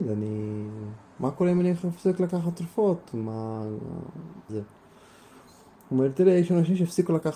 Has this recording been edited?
yes; 1 cut; at 4.5 s

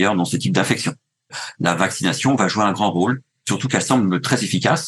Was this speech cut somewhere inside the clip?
no; 0 cuts

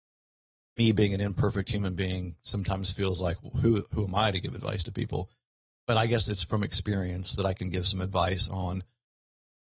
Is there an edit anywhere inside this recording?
no; 0 cuts

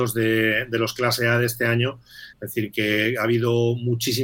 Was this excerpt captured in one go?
no; 1 cut; at 2.3 s

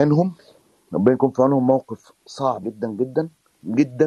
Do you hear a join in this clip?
yes; 1 cut; at 2.6 s

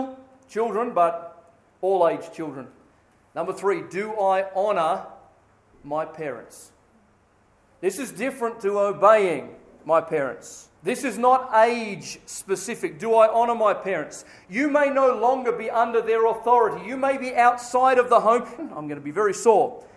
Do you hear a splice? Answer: yes; 2 cuts; at 10.8 s, 18.6 s

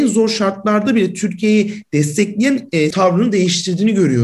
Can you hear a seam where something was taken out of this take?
yes; 1 cut; at 2.9 s

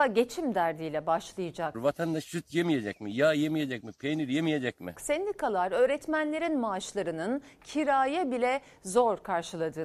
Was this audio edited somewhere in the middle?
yes; 2 cuts; at 1.7 s, 4.9 s

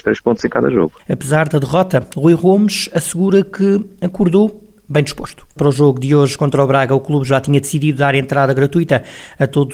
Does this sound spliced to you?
yes; 2 cuts; at 1.0 s, 5.6 s

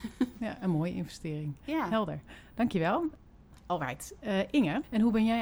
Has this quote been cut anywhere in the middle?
no; 0 cuts

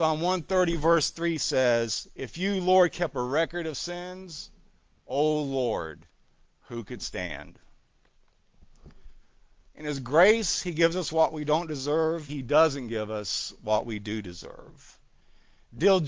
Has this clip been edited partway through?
yes; 2 cuts; at 9.6 s, 12.3 s

